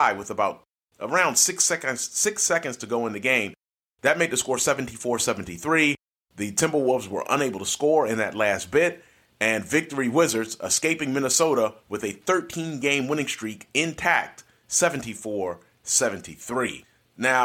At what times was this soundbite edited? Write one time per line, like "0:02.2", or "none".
none